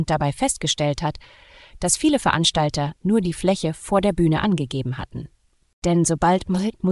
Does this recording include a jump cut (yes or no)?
yes